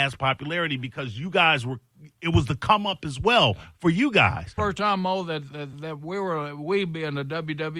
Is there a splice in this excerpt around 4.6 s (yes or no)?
yes